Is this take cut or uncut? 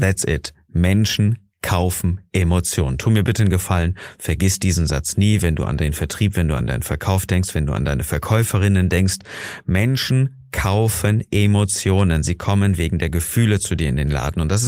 uncut